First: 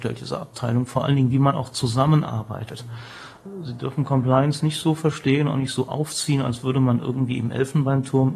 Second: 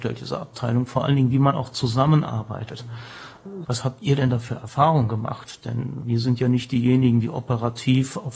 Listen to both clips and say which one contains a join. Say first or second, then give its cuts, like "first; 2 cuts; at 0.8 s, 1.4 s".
second; 1 cut; at 3.6 s